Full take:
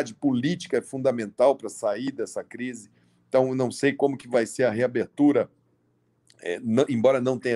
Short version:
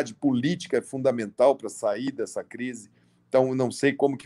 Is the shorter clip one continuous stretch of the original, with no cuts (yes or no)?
yes